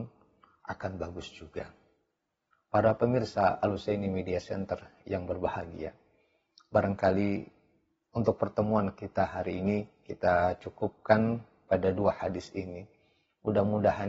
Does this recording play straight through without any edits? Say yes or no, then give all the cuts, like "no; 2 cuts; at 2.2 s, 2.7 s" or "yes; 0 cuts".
yes; 0 cuts